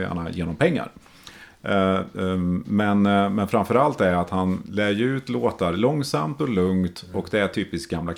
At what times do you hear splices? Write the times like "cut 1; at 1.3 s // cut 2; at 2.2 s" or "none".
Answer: none